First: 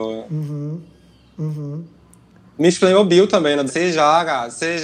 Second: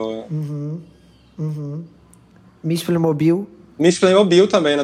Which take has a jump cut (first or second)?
first